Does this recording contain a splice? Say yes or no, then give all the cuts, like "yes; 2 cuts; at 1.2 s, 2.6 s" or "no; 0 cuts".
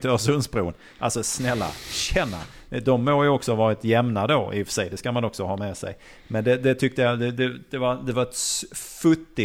no; 0 cuts